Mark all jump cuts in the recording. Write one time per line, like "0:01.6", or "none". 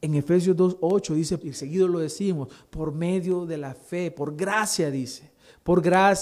0:01.4